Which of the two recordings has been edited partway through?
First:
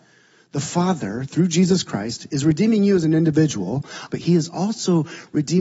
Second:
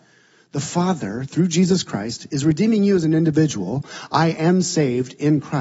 first; 1 cut; at 4.1 s

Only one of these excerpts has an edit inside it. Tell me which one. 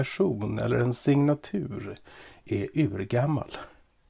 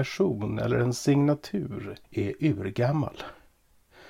second; 1 cut; at 2.0 s

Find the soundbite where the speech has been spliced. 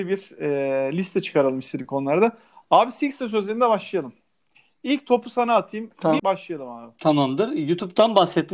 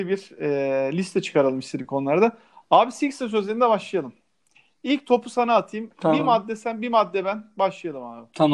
first; 1 cut; at 6.2 s

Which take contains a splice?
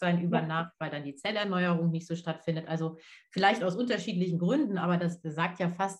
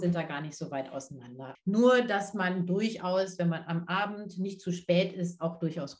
second; 1 cut; at 1.5 s

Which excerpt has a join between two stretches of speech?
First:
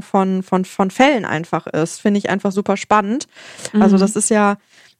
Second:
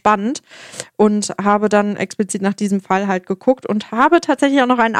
first; 2 cuts; at 2.5 s, 3.7 s

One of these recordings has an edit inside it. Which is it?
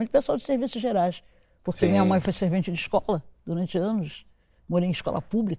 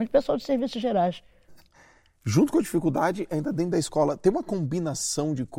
second; 1 cut; at 1.5 s

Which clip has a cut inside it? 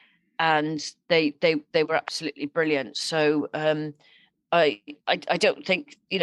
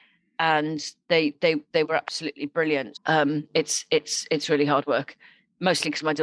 second; 1 cut; at 2.9 s

